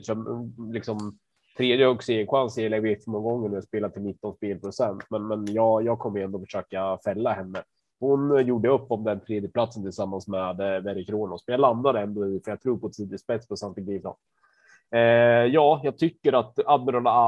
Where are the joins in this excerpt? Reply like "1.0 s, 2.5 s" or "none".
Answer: 14.0 s